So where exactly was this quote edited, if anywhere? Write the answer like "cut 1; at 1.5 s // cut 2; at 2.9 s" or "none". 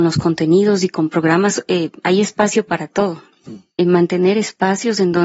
cut 1; at 3.8 s